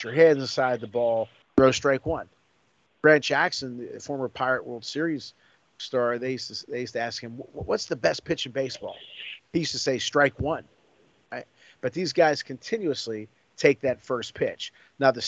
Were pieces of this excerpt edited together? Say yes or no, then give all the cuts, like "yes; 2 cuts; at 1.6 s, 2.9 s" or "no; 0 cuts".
yes; 1 cut; at 1.4 s